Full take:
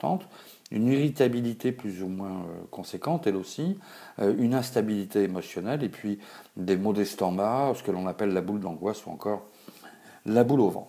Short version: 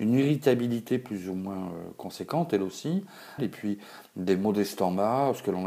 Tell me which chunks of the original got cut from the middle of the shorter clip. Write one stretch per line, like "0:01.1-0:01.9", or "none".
0:04.1-0:05.8